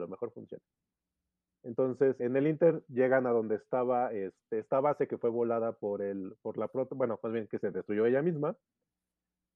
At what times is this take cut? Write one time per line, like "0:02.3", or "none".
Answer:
0:02.2